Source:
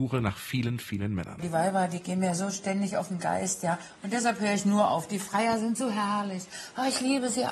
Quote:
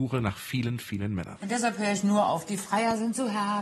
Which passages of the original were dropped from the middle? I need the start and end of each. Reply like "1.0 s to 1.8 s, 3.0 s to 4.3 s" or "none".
1.4 s to 4.0 s